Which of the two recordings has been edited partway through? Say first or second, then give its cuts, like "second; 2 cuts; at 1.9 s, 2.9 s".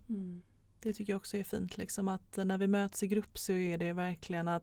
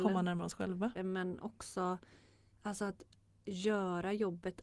second; 1 cut; at 1.0 s